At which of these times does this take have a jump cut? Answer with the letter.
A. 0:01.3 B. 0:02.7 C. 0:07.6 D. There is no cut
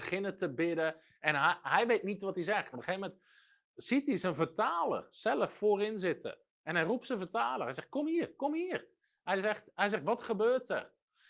B